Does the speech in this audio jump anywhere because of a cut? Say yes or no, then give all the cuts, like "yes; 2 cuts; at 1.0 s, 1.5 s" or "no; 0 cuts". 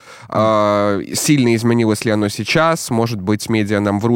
no; 0 cuts